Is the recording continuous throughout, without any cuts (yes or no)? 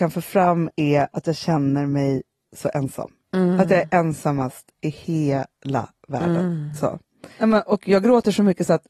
yes